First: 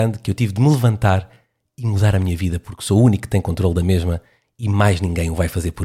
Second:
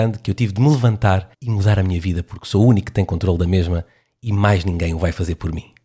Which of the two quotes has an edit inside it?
second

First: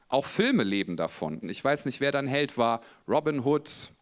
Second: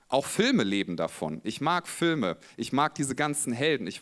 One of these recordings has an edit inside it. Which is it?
first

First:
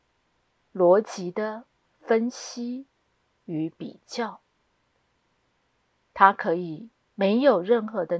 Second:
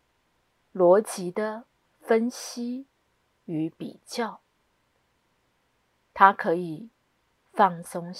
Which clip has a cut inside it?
first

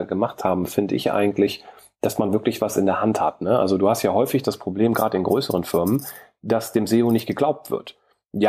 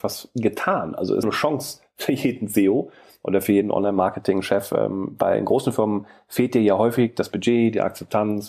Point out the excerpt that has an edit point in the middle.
second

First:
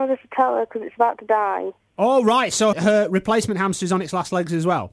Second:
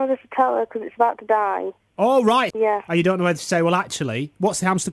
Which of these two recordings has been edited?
second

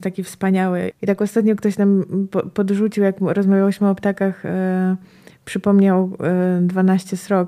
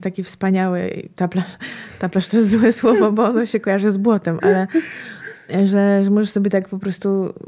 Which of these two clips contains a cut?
first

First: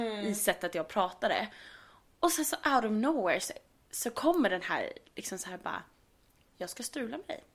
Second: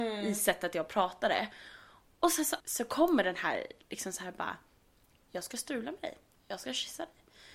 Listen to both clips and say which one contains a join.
second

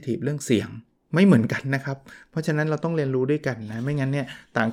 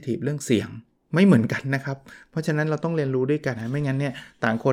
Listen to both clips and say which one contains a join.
second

